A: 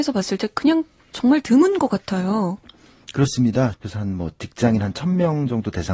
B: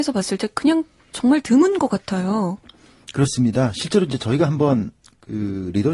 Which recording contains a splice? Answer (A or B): A